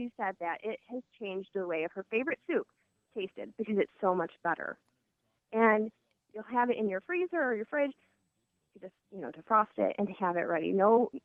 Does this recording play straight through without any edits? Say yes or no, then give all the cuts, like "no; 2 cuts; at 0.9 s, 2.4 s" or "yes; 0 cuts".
no; 1 cut; at 5.4 s